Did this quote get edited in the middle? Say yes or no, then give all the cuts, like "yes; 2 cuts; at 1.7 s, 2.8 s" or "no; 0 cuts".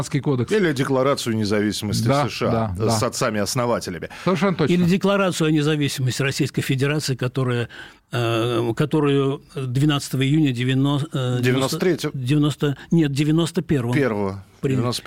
no; 0 cuts